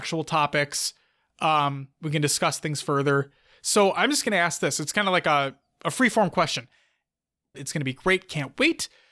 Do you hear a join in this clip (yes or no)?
yes